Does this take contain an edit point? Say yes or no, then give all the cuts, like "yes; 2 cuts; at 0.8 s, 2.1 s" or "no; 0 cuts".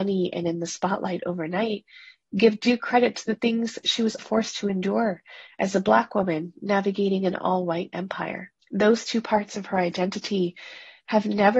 yes; 2 cuts; at 4.2 s, 8.6 s